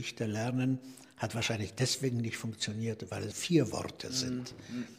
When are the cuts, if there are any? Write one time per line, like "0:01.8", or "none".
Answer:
0:03.3